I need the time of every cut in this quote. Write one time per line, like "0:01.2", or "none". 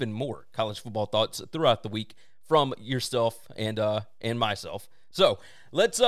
none